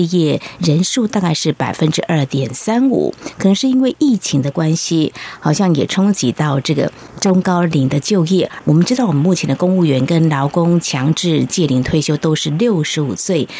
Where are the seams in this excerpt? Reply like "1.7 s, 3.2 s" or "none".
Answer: none